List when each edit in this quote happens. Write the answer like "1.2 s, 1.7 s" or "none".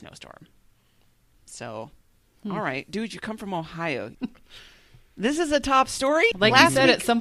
4.1 s, 6.3 s